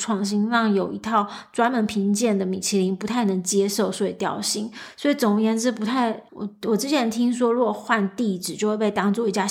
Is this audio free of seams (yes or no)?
no